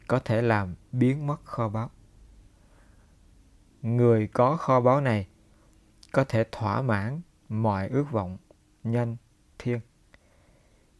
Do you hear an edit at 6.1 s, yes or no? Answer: no